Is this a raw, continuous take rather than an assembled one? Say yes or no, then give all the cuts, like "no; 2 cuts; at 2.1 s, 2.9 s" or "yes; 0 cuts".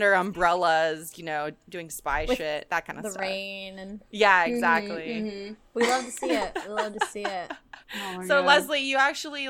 no; 1 cut; at 7.8 s